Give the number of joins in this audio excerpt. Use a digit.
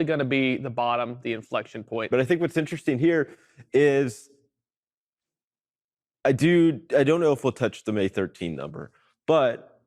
1